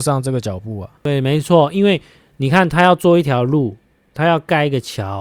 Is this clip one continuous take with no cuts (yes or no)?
yes